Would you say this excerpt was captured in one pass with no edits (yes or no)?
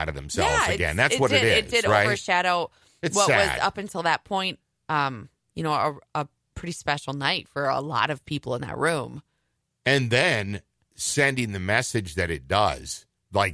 yes